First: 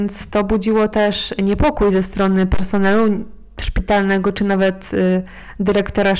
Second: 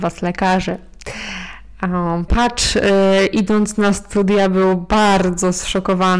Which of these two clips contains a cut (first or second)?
second